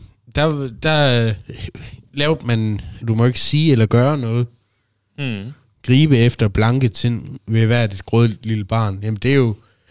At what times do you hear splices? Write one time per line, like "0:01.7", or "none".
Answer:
0:03.0